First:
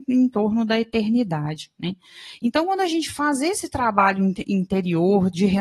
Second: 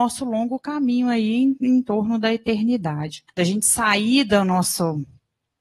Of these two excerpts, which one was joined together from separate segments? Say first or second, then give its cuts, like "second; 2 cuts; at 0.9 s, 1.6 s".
second; 1 cut; at 3.3 s